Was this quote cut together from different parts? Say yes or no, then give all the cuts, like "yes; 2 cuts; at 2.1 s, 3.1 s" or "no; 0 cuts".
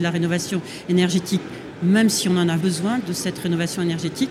yes; 1 cut; at 2.6 s